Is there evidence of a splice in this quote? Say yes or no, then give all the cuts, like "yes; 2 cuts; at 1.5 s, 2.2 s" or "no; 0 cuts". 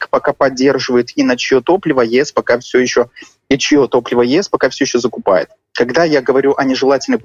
no; 0 cuts